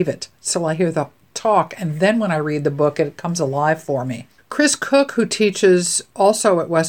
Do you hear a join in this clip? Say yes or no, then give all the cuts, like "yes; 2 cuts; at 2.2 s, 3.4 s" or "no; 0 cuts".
yes; 1 cut; at 4.4 s